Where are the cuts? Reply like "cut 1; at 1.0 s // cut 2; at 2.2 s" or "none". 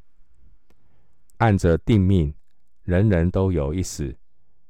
cut 1; at 1.3 s